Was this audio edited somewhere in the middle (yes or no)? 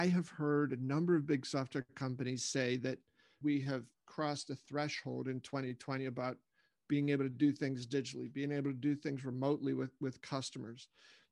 yes